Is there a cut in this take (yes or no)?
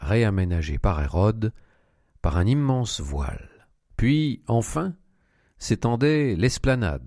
yes